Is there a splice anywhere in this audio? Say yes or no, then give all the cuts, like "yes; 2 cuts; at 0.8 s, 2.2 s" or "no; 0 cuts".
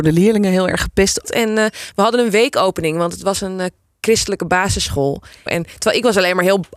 yes; 2 cuts; at 1.2 s, 5.5 s